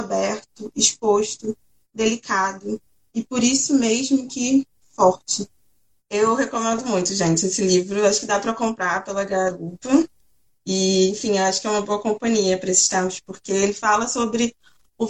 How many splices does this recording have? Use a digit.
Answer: 1